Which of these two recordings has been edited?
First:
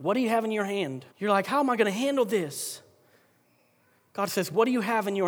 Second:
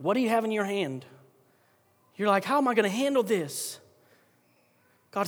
first; 1 cut; at 1.1 s

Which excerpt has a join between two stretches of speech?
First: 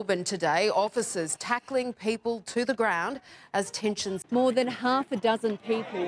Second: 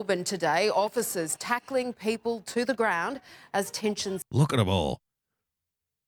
first; 1 cut; at 4.2 s

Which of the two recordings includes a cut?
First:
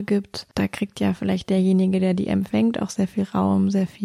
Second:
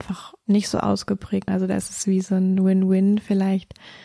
second; 1 cut; at 1.5 s

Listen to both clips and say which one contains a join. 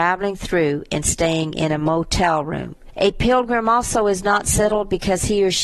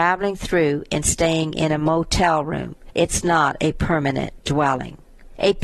first; 1 cut; at 2.9 s

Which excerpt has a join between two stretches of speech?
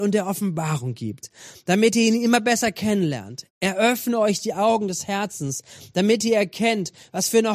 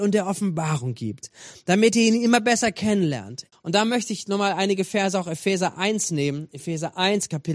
second; 1 cut; at 3.5 s

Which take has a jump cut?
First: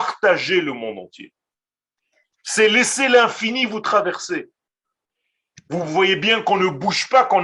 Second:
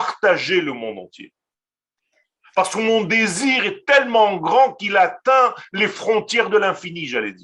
first; 1 cut; at 2.3 s

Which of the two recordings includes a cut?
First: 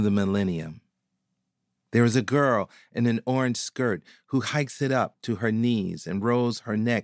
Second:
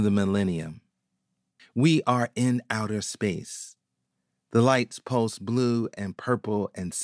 second; 1 cut; at 1.6 s

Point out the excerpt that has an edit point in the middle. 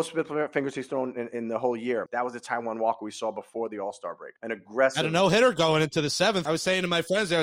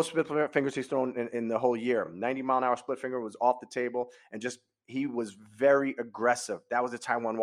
first; 2 cuts; at 2.1 s, 6.5 s

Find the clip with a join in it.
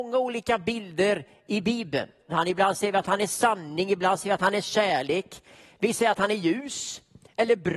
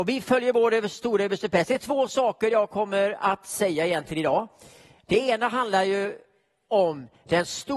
first; 1 cut; at 2.3 s

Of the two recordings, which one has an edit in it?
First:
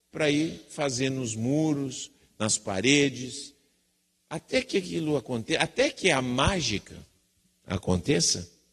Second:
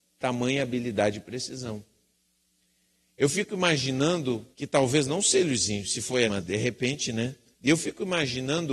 second; 3 cuts; at 4.5 s, 6.3 s, 7.5 s

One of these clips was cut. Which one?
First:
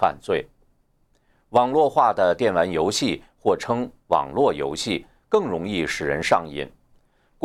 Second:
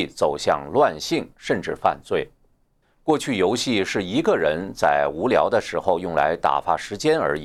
second; 1 cut; at 2.8 s

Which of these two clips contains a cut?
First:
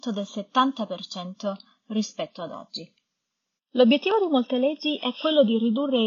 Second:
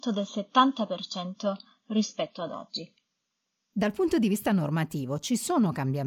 first; 1 cut; at 3.6 s

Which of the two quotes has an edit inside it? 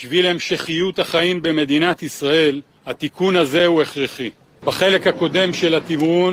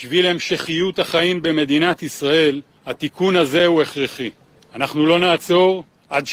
first; 1 cut; at 4.6 s

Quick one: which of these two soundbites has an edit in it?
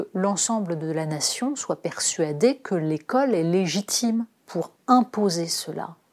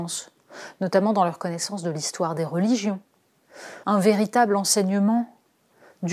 second; 1 cut; at 3.8 s

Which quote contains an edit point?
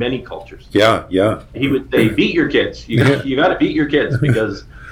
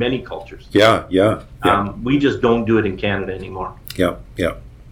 first; 1 cut; at 1.5 s

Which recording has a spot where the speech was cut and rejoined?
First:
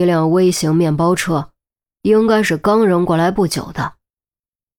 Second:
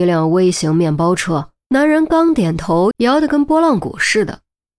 second; 2 cuts; at 1.6 s, 2.9 s

